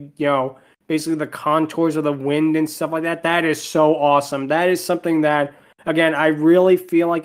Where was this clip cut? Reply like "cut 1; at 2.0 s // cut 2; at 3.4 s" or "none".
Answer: none